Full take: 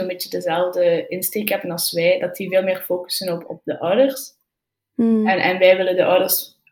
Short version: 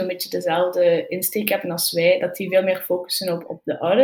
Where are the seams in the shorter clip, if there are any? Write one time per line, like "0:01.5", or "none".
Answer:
none